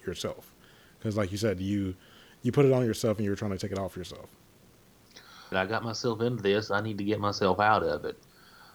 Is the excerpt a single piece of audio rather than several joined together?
no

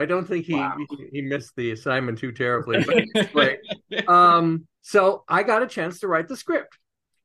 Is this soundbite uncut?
no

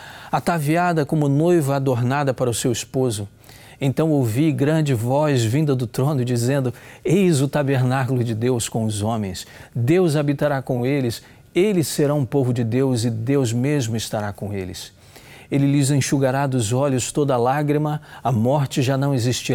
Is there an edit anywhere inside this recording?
no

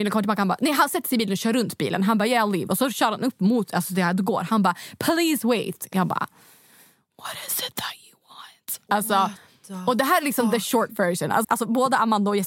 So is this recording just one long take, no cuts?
no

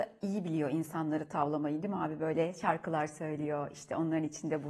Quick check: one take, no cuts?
yes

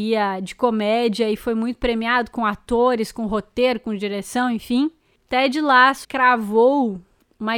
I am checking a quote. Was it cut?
yes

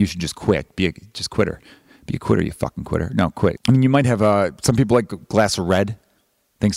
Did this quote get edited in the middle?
yes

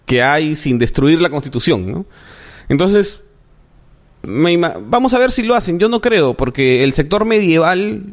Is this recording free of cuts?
yes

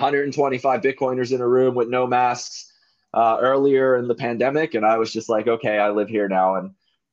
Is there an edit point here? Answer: no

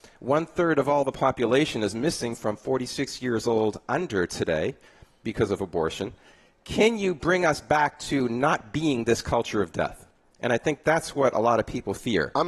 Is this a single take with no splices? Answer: yes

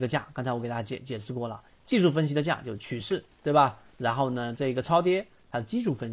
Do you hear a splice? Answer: no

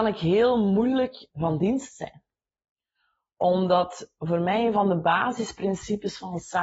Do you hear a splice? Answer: yes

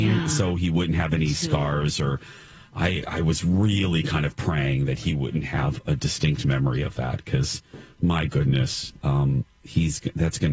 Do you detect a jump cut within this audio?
no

